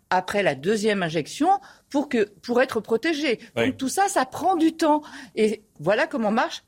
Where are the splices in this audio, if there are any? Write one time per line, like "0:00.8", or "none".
0:05.8